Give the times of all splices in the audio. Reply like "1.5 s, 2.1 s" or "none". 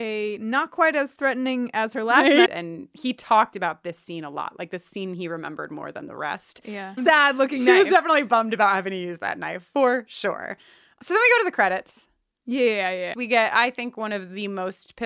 2.5 s, 7.0 s, 13.1 s